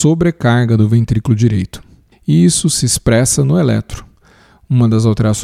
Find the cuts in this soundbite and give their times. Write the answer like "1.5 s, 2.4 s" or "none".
2.1 s